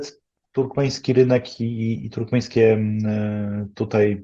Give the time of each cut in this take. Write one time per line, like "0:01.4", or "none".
none